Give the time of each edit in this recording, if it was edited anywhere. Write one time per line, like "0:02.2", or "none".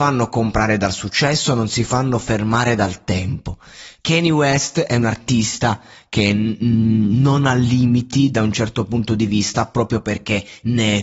0:04.0